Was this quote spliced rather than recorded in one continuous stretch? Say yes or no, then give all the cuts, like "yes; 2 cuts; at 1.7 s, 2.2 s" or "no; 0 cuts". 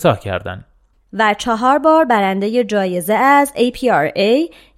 yes; 1 cut; at 0.9 s